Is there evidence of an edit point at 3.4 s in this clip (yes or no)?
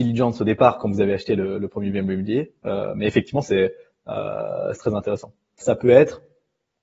no